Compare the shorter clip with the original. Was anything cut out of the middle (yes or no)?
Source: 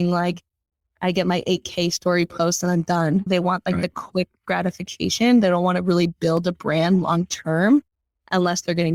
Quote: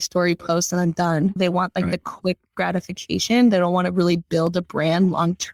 no